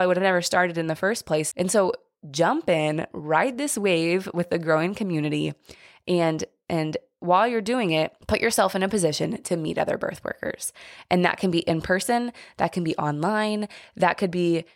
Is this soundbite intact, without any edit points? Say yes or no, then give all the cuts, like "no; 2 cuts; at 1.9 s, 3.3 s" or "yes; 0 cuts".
no; 2 cuts; at 1.5 s, 8.2 s